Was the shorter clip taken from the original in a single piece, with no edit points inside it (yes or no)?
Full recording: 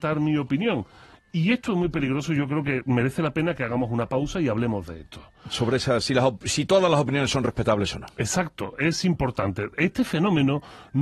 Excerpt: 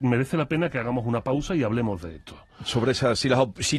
yes